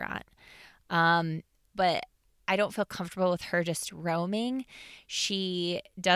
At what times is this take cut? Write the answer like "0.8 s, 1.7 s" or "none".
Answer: 1.7 s